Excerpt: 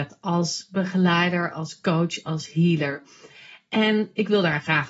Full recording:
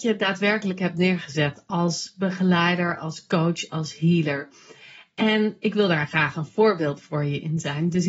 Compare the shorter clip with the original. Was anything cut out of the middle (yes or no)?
no